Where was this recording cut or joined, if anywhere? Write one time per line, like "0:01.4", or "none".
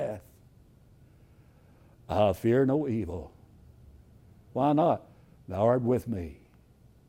none